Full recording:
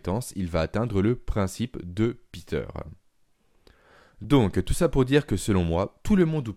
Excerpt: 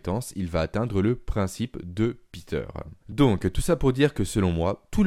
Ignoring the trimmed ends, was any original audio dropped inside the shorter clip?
yes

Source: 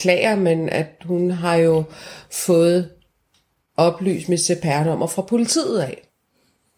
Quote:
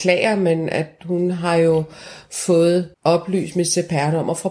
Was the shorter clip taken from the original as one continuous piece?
no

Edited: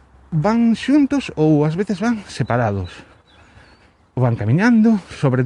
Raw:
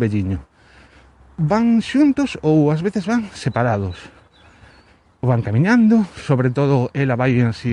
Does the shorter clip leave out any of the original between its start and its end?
no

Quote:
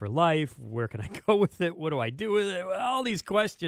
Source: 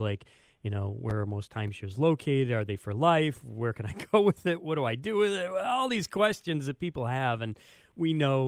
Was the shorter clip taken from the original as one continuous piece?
yes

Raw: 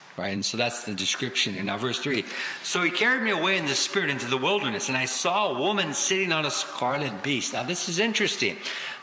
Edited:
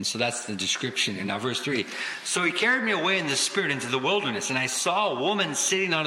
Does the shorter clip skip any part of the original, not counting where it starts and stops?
no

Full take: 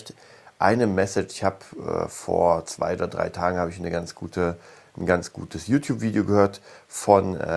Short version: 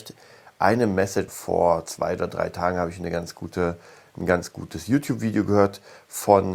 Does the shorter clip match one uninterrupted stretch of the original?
no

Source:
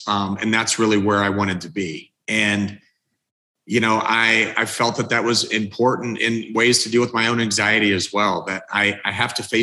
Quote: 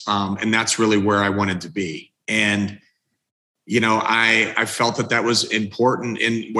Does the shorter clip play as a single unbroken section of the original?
yes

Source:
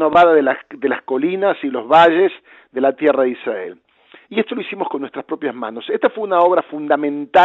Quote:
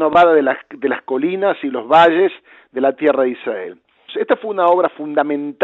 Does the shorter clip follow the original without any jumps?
no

